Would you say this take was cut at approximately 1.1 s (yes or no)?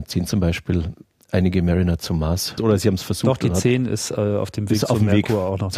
no